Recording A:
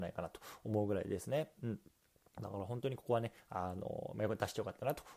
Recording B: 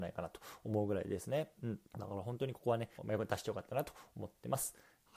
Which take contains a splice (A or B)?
B